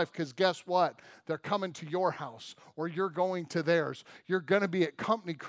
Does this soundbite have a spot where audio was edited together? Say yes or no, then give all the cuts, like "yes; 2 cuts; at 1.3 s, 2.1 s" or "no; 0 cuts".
no; 0 cuts